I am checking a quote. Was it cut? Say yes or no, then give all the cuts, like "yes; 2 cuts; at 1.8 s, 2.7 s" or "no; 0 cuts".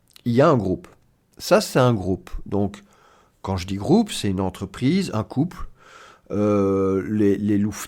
yes; 1 cut; at 1.2 s